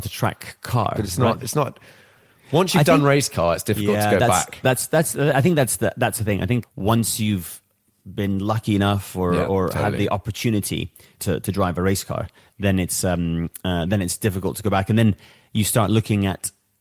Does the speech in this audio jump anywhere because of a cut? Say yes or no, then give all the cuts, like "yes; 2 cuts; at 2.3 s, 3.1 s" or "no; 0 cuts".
no; 0 cuts